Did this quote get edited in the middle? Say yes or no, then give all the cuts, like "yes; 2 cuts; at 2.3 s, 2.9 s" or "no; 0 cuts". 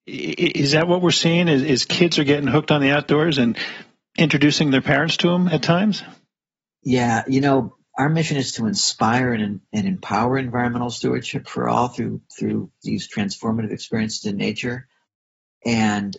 no; 0 cuts